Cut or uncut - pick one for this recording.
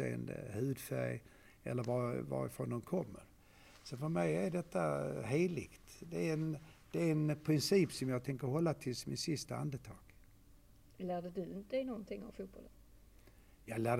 uncut